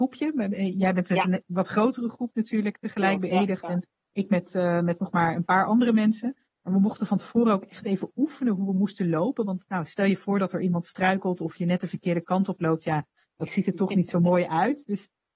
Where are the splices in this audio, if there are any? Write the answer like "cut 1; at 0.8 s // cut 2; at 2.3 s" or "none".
none

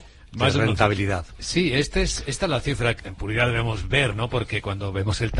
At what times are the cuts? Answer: cut 1; at 3.0 s

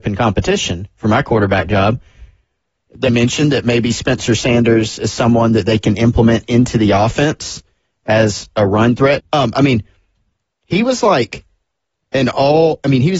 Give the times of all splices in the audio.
cut 1; at 3.1 s // cut 2; at 9.2 s

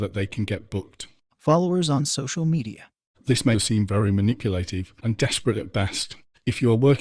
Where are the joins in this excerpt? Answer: cut 1; at 3.5 s // cut 2; at 5.0 s

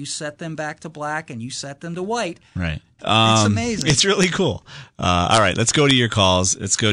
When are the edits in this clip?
cut 1; at 3.0 s

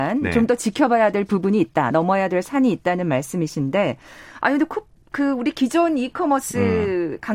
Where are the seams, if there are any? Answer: none

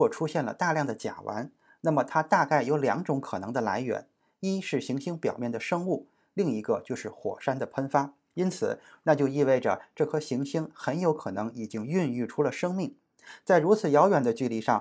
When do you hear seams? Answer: cut 1; at 9.0 s

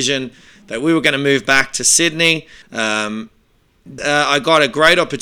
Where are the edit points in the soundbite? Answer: cut 1; at 2.6 s // cut 2; at 4.0 s

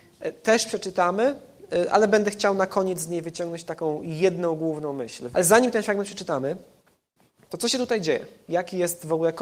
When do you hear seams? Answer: cut 1; at 5.3 s

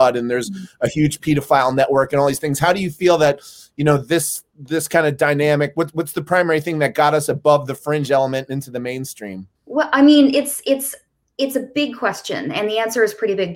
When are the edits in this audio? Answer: cut 1; at 9.6 s

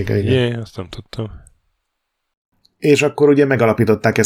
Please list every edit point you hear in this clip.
none

